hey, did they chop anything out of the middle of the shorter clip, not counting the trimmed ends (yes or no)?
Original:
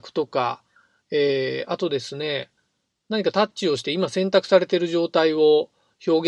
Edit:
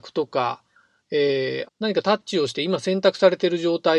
yes